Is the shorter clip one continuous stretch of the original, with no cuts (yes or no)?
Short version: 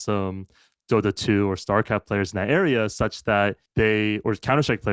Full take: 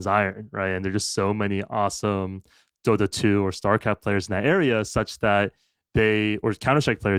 no